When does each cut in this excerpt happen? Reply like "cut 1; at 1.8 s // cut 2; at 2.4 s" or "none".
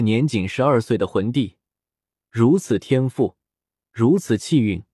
none